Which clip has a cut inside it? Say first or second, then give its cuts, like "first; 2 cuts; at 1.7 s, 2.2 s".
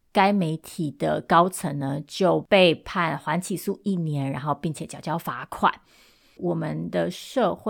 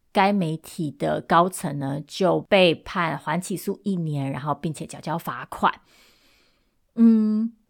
first; 1 cut; at 6.4 s